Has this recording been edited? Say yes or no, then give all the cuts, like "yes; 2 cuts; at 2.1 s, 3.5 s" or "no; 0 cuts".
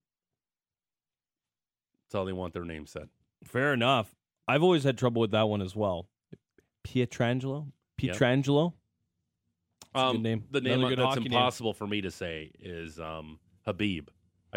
no; 0 cuts